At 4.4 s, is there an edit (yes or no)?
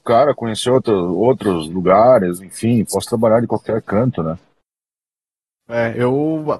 no